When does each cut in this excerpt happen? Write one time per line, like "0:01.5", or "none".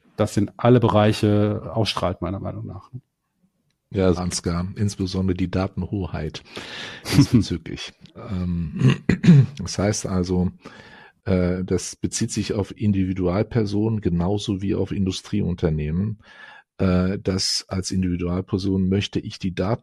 0:04.2